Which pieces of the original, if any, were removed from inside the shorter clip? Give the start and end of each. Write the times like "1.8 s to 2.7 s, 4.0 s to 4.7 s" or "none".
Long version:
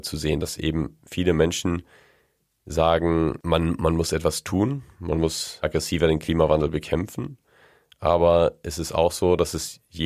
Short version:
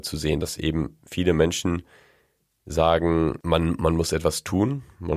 none